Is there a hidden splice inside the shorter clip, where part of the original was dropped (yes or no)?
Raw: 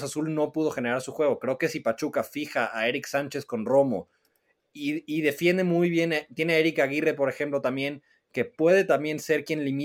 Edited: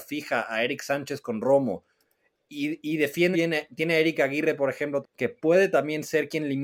yes